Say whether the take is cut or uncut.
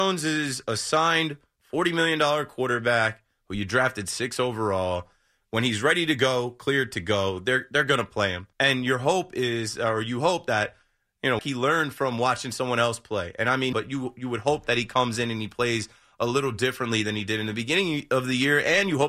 cut